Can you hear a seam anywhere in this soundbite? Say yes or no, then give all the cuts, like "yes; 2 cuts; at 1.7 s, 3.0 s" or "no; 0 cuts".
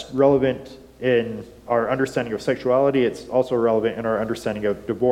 yes; 1 cut; at 1.7 s